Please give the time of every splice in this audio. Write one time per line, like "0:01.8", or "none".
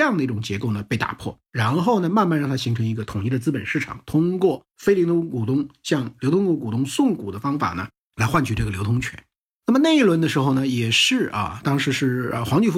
none